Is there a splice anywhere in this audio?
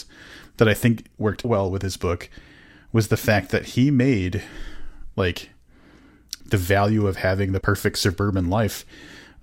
yes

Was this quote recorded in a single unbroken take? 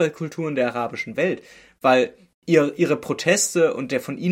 yes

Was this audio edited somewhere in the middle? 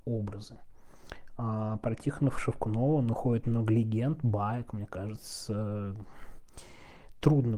yes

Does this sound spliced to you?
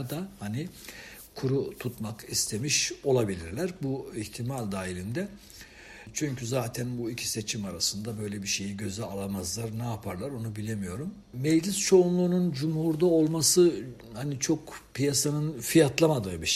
no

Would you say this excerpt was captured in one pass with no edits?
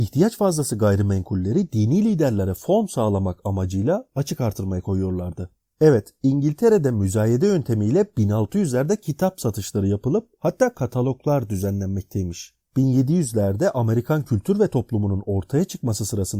yes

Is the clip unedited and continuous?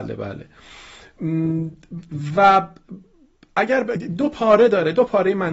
yes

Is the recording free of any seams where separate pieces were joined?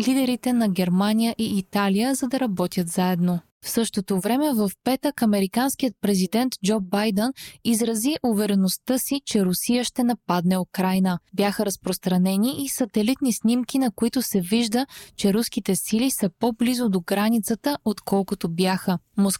yes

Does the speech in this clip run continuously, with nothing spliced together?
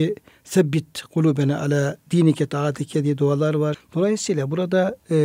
no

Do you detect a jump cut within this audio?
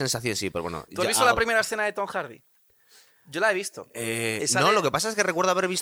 no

